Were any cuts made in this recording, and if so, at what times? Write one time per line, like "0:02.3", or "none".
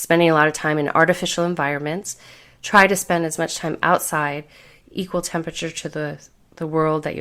none